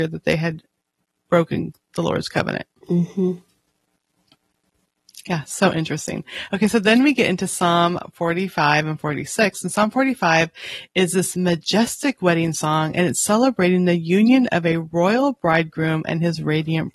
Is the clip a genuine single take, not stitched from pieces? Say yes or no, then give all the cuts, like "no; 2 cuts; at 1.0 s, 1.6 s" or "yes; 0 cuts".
yes; 0 cuts